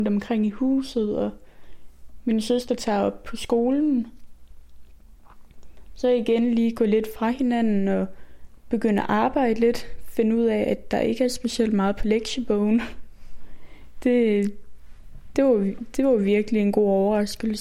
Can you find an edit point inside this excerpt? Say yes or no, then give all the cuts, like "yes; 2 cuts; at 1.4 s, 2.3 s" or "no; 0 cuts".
no; 0 cuts